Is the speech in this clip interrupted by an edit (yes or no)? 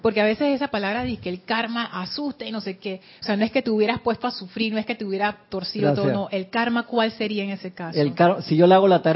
yes